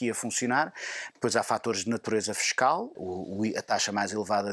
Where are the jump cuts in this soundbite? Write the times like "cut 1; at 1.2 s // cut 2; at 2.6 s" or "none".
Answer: cut 1; at 1.1 s // cut 2; at 2.9 s